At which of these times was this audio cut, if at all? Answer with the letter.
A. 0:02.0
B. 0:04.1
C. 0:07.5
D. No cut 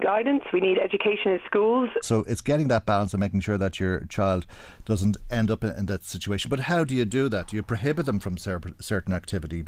A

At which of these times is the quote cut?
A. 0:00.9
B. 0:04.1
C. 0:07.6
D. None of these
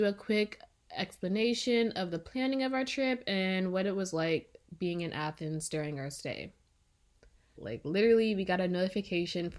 C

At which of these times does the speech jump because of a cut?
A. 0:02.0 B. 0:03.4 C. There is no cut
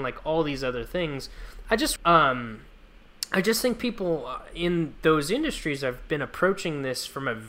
A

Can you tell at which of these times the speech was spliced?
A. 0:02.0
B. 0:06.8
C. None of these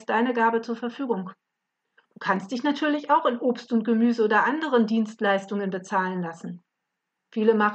A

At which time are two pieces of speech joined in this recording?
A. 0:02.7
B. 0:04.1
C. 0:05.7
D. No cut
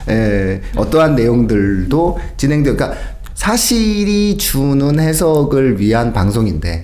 D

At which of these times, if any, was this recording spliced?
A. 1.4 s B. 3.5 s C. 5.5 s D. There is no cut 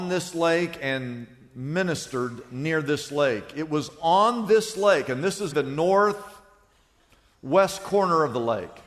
C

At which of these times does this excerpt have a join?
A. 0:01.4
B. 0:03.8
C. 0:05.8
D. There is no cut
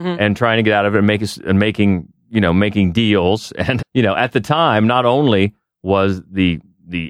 B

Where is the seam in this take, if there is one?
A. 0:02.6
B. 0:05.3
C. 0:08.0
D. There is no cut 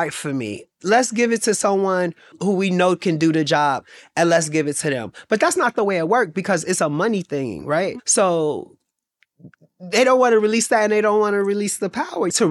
C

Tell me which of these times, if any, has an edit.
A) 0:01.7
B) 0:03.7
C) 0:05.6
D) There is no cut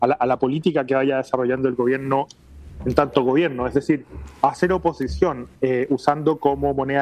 C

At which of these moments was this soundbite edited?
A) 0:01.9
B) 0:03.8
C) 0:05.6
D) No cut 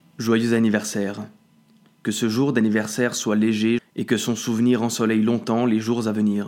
B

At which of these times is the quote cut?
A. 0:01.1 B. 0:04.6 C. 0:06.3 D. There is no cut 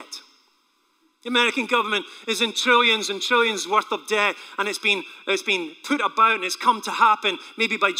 D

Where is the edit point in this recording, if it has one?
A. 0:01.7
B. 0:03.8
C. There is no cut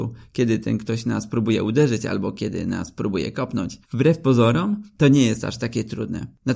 B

